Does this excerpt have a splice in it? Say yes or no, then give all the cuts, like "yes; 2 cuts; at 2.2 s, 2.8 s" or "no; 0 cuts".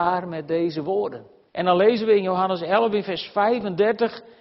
yes; 1 cut; at 1.5 s